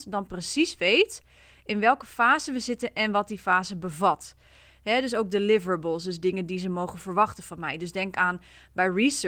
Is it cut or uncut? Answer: uncut